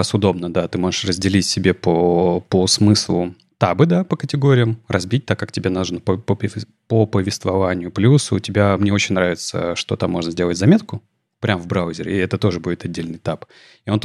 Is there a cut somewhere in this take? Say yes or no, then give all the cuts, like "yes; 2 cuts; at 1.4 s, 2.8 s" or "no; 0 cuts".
no; 0 cuts